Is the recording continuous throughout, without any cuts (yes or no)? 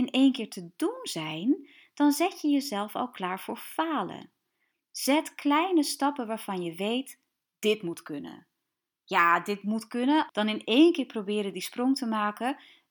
no